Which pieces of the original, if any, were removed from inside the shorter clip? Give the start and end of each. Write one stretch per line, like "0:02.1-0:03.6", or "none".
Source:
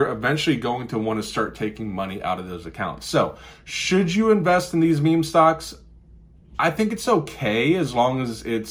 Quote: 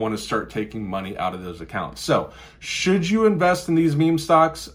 none